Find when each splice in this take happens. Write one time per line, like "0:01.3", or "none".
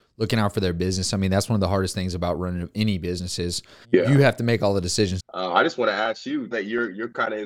0:03.8
0:05.2
0:06.5

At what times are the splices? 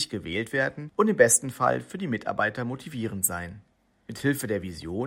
none

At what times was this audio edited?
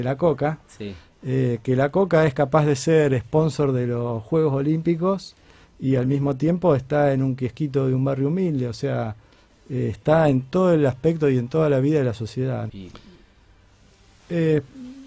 0:12.7

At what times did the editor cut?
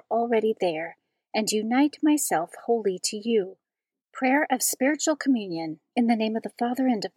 0:04.0

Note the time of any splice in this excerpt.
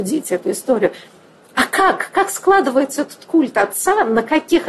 none

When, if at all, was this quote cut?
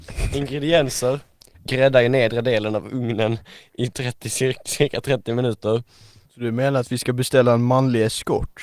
0:01.5
0:06.2

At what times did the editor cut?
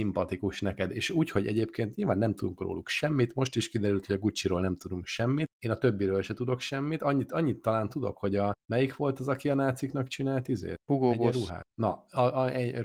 none

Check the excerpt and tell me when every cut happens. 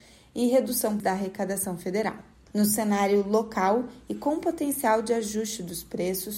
0:01.0
0:02.5

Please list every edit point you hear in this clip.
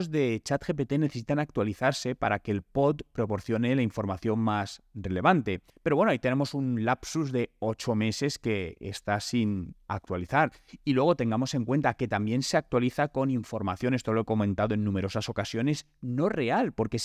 0:05.7

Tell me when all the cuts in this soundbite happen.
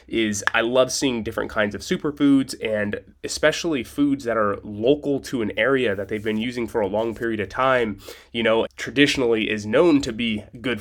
0:08.7

